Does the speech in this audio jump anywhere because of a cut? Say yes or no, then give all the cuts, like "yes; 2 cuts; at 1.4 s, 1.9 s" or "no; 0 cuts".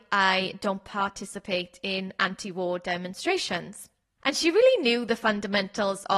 yes; 1 cut; at 4.2 s